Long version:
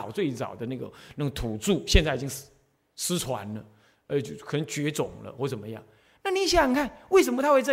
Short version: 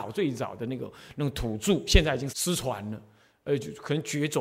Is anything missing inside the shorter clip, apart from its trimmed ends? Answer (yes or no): yes